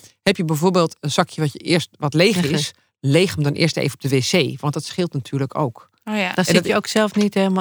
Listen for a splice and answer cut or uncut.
uncut